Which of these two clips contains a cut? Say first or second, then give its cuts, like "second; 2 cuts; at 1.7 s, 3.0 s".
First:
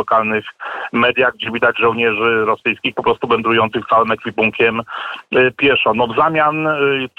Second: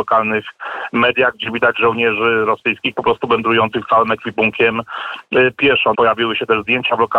second; 1 cut; at 5.9 s